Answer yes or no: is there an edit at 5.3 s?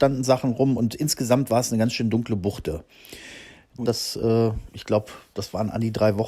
no